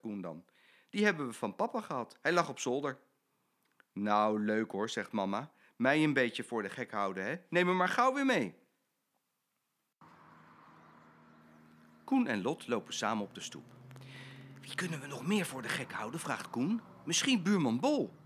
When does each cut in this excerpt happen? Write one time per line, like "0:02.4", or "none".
none

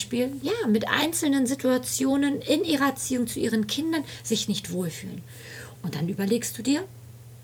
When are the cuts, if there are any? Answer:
0:05.7

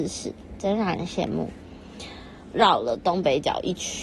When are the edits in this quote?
0:02.5

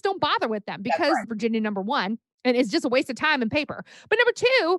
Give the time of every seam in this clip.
0:01.2

